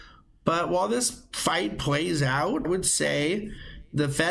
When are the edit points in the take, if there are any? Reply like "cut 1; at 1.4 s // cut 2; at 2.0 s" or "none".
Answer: cut 1; at 2.6 s